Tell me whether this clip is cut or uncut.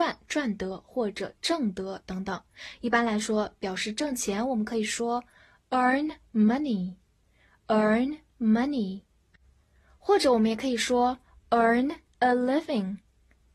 uncut